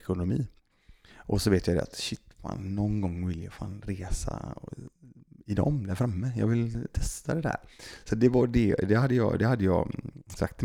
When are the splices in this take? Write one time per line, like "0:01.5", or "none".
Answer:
none